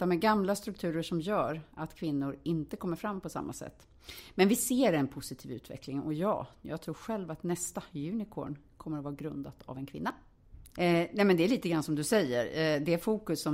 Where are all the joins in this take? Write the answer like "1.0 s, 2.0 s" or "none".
10.7 s